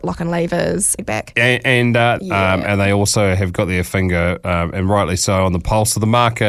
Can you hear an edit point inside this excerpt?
yes; 2 cuts; at 1.0 s, 2.2 s

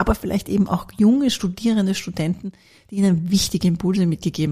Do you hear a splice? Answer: no; 0 cuts

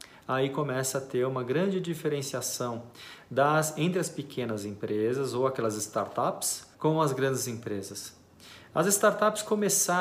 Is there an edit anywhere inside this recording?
yes; 1 cut; at 6.7 s

